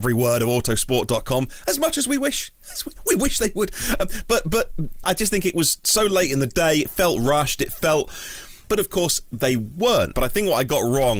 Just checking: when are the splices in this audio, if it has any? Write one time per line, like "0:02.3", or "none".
0:05.0
0:08.7
0:10.1